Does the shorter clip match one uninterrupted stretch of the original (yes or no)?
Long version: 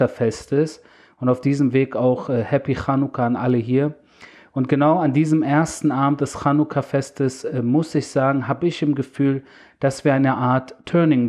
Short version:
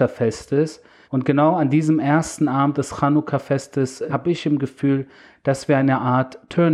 no